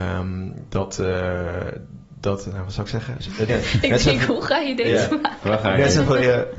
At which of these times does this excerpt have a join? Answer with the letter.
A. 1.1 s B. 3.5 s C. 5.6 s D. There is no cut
B